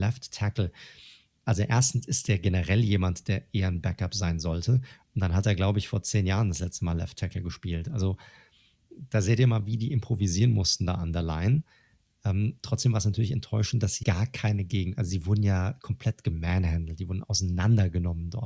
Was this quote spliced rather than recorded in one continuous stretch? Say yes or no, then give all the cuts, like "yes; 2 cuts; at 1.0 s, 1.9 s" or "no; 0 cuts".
yes; 1 cut; at 14.0 s